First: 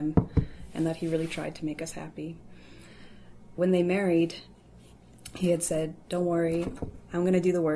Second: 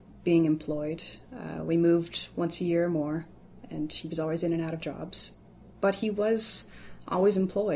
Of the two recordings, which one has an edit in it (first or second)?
first